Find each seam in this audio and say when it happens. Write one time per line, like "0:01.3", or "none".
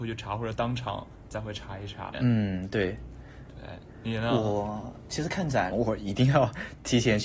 0:02.1
0:05.7